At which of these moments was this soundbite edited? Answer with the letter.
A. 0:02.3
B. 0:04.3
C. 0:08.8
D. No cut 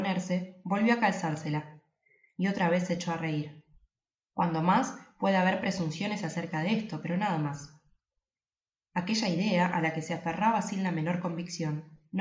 B